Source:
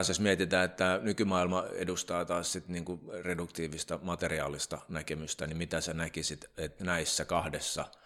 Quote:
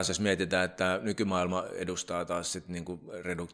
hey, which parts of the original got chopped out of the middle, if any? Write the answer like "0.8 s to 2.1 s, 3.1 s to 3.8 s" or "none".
none